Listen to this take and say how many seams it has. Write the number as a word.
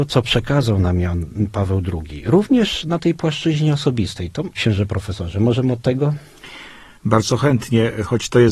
one